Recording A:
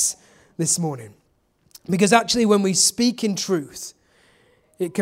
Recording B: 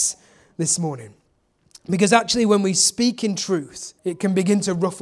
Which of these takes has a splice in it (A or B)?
B